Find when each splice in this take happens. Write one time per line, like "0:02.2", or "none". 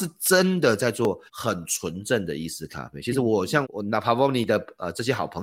0:01.3
0:03.6